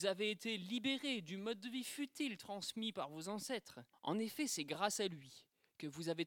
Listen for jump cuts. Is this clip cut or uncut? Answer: cut